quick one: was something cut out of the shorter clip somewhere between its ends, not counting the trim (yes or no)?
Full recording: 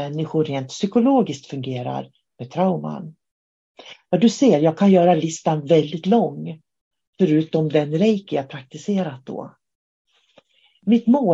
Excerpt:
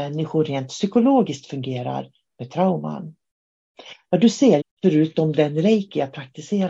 yes